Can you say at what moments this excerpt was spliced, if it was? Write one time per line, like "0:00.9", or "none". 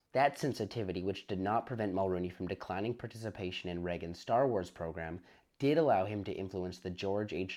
none